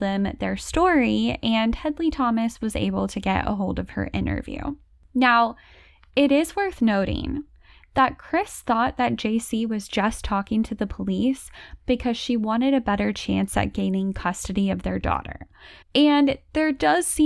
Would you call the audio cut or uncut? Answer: cut